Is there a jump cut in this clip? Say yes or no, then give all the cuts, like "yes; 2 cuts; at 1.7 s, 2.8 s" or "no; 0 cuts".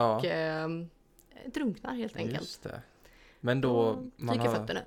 no; 0 cuts